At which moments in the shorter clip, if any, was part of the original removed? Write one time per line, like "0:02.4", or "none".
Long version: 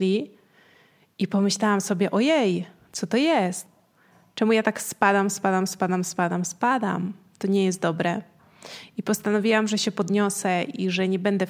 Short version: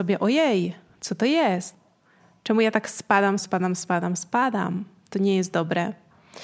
0:03.4